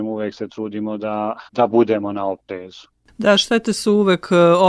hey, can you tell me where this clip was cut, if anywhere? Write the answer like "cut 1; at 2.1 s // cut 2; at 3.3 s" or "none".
cut 1; at 1.5 s